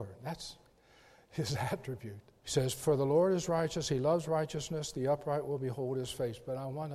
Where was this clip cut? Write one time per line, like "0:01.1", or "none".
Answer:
0:02.4